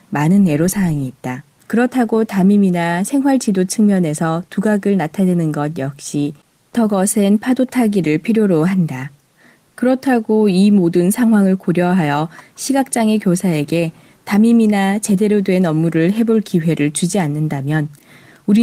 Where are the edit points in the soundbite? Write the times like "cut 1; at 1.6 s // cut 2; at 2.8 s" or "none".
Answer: cut 1; at 1.6 s // cut 2; at 9.6 s